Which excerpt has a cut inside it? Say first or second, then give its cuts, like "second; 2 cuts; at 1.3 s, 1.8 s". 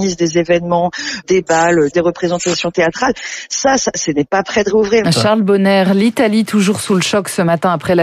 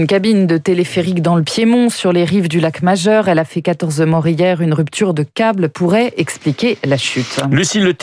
first; 2 cuts; at 1.9 s, 5.0 s